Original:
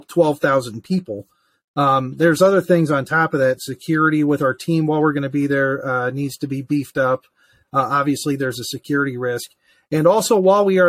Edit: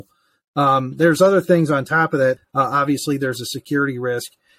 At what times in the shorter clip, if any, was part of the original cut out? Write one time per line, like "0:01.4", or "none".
0:02.4

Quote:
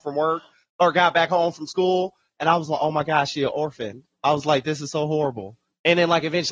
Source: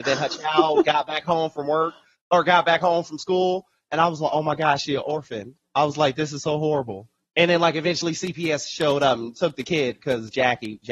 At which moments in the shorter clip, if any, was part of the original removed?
none

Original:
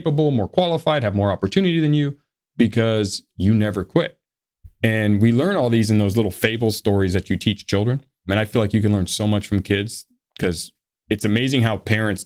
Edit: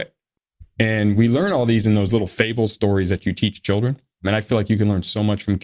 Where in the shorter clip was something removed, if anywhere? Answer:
none

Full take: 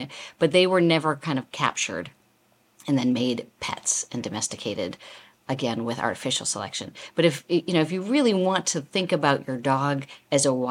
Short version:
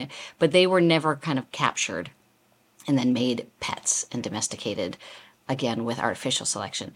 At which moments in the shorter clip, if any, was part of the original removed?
none

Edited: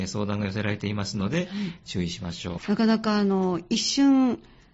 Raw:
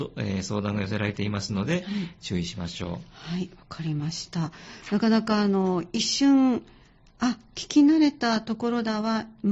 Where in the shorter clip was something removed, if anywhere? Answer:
0:02.6

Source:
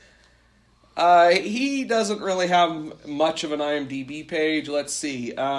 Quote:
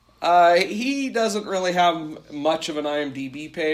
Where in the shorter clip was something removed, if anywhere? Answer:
none

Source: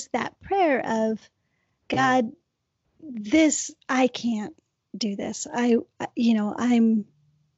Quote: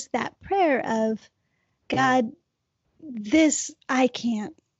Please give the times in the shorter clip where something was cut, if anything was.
none

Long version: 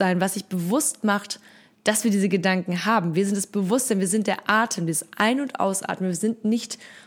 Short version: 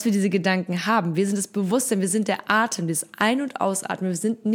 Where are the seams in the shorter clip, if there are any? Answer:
none

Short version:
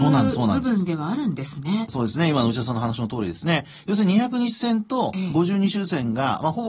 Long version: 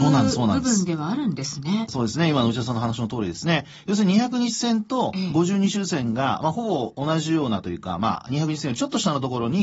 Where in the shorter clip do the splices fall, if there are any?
none

